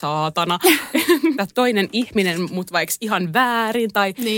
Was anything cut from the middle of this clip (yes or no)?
yes